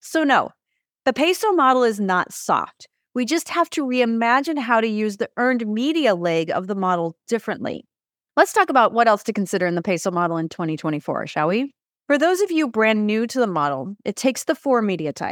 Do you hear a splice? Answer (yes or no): no